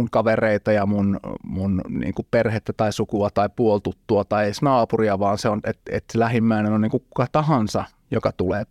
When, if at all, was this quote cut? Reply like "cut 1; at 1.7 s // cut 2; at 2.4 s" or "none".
cut 1; at 5.8 s